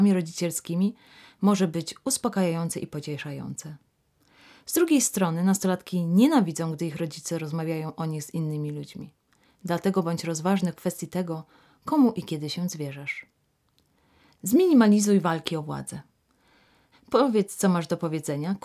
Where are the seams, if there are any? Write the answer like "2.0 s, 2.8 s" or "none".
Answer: 16.9 s